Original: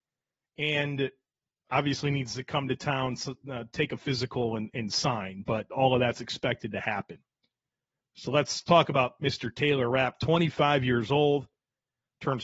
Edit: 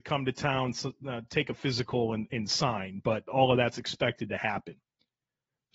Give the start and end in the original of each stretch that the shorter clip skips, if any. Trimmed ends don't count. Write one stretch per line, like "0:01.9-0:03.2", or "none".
none